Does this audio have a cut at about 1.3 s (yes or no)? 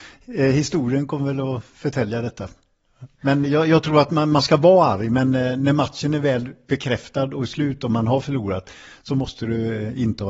no